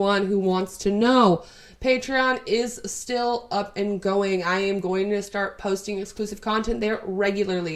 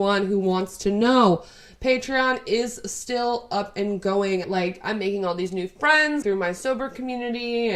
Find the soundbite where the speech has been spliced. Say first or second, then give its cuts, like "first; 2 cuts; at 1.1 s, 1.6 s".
second; 2 cuts; at 4.4 s, 6.2 s